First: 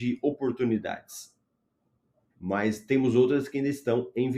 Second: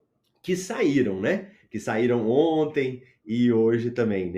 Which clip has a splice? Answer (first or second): first